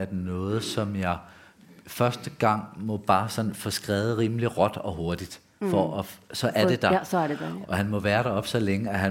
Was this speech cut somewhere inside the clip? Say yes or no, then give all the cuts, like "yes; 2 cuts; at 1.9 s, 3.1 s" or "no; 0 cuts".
yes; 1 cut; at 7.6 s